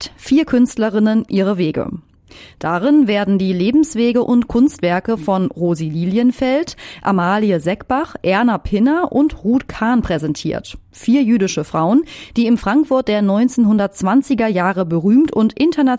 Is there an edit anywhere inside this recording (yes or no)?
yes